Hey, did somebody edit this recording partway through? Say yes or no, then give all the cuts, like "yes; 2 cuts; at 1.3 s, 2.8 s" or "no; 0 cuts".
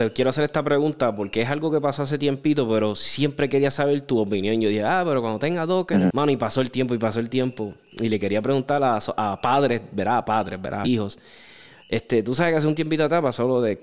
yes; 2 cuts; at 6.1 s, 10.8 s